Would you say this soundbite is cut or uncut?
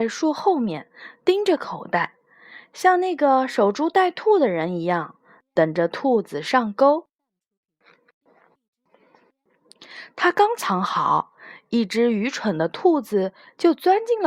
uncut